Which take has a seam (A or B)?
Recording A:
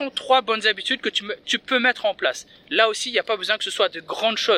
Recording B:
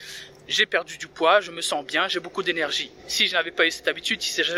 B